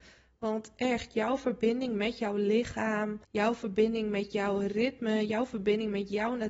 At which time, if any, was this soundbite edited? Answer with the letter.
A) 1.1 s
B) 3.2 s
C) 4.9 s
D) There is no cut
B